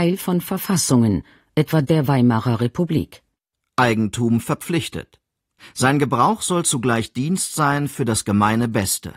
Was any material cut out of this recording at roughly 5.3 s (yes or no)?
no